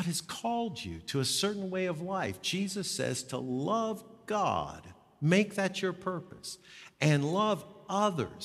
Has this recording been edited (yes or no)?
no